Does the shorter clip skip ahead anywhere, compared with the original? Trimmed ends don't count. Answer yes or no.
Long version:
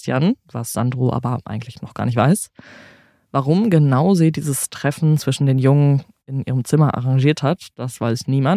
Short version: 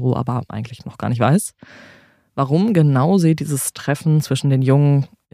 no